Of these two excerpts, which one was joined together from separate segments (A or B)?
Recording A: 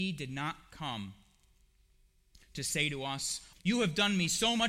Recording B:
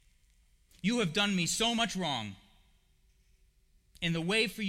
A